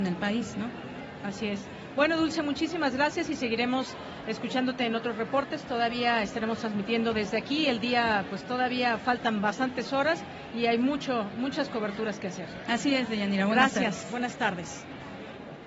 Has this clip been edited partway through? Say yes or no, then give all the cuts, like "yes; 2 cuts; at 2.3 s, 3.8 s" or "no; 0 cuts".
no; 0 cuts